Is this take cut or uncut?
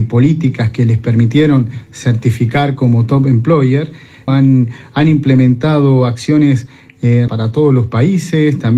cut